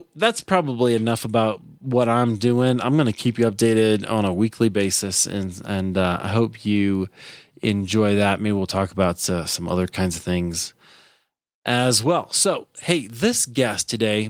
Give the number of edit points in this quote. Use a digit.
0